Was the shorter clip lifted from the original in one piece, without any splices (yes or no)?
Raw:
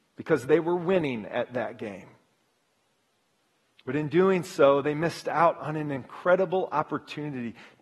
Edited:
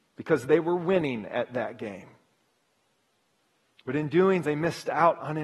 no